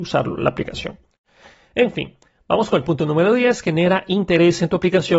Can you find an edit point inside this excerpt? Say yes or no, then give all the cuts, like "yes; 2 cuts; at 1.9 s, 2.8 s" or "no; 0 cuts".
no; 0 cuts